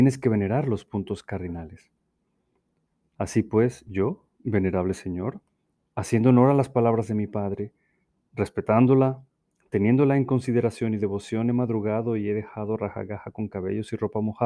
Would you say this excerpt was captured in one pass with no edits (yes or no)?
yes